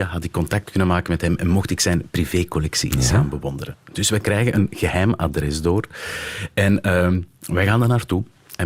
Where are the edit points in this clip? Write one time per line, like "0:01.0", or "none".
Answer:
none